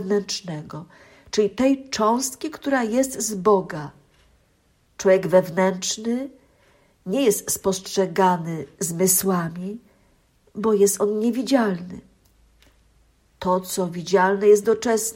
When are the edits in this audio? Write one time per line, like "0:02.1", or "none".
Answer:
0:04.8

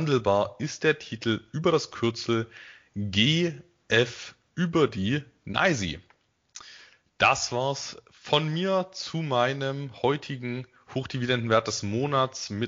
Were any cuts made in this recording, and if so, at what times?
none

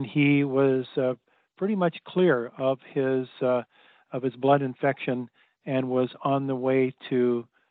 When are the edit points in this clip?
none

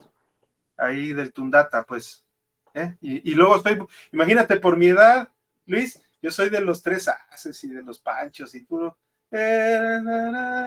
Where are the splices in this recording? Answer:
none

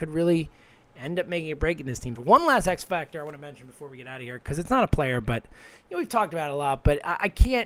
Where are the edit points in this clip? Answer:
0:02.2

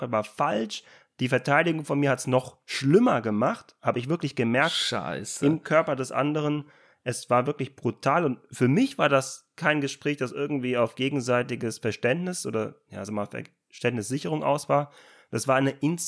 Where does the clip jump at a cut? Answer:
none

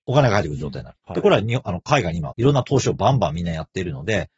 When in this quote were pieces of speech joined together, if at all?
0:01.0
0:02.3

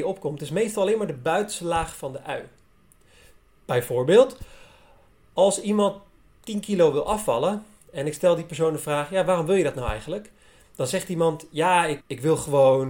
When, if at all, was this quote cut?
0:12.0

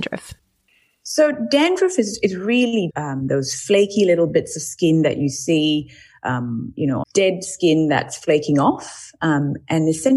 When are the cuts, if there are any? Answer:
0:02.9
0:07.0

